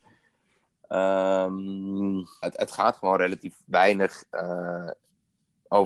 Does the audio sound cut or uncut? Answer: cut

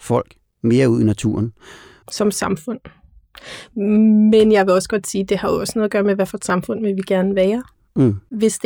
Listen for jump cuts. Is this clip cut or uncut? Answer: cut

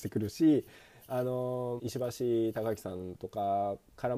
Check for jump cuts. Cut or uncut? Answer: cut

